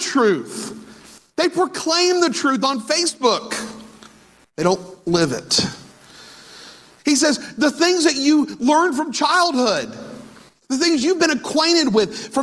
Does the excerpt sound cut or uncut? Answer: cut